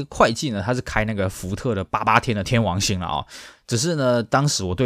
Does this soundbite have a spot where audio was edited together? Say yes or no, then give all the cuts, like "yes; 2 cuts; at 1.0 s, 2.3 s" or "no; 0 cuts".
no; 0 cuts